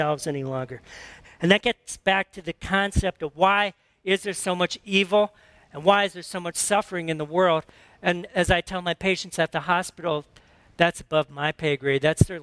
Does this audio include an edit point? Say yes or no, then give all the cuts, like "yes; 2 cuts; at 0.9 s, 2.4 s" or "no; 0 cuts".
yes; 1 cut; at 1.2 s